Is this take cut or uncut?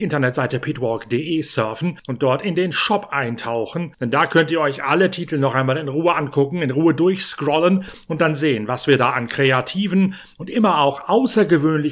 uncut